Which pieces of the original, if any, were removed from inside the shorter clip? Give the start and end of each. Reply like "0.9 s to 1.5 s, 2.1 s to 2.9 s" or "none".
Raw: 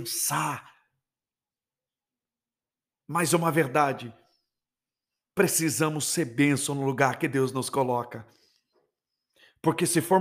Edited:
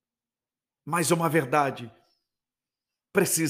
none

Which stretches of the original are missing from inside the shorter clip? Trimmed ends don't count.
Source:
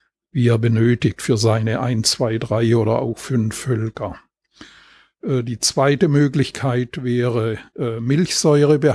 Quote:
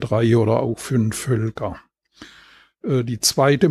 none

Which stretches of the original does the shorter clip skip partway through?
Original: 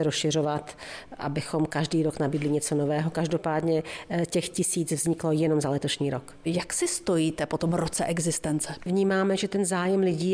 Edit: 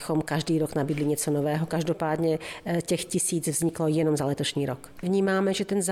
6.4 s to 8.8 s

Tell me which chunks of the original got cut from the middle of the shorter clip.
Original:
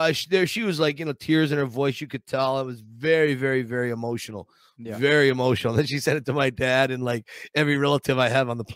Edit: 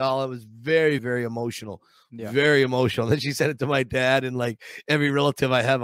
3.4 s to 3.7 s

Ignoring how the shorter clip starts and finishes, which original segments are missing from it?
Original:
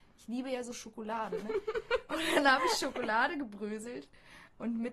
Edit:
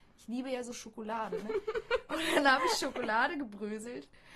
none

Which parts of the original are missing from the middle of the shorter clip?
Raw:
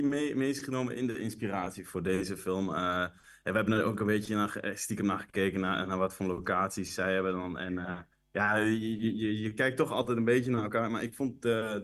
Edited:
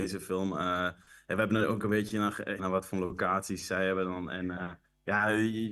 4.7 s to 5.9 s

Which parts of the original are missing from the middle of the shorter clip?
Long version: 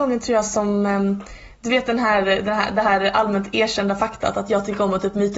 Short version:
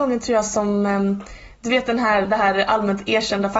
2.2 s to 2.7 s

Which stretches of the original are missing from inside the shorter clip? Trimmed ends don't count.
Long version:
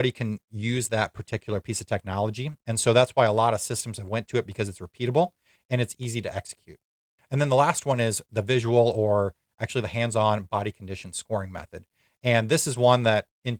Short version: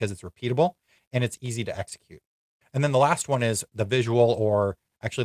none

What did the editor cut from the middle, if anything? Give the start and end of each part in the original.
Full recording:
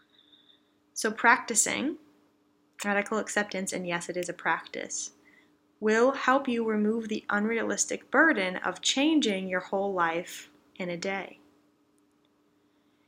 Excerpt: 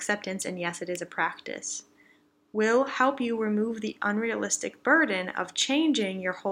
none

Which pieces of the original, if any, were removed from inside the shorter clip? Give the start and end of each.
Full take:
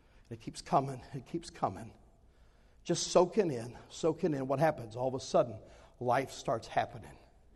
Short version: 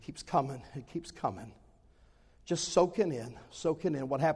none

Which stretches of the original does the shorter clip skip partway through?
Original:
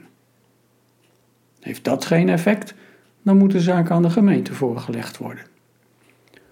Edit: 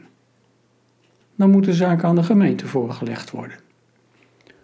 1.2 s to 3.1 s

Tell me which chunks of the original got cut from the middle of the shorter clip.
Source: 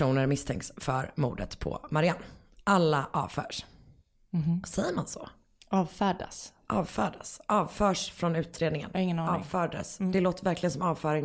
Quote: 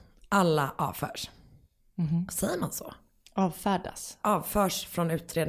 6.6 s to 7.5 s

